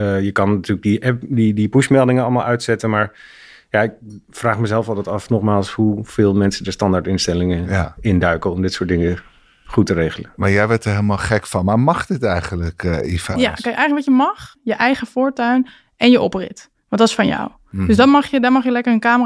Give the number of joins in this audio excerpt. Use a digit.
1